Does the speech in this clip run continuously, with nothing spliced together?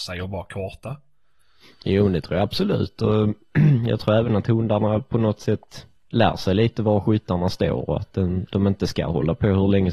no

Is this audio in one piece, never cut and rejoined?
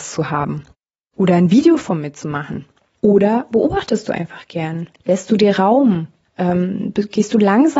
no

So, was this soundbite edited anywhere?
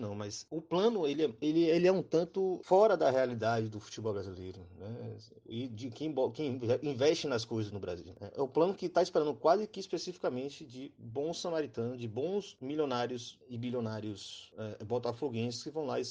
no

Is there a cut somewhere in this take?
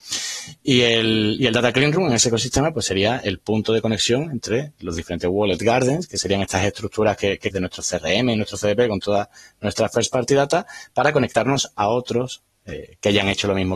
yes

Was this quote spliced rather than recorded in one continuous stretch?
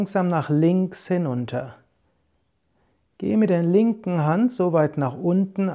no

